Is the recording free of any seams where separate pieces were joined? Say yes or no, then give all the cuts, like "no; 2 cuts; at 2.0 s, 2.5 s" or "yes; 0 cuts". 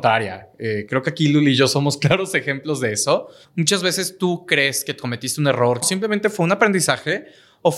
no; 2 cuts; at 3.4 s, 5.8 s